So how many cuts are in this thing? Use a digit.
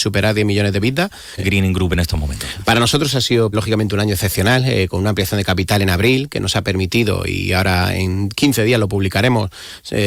2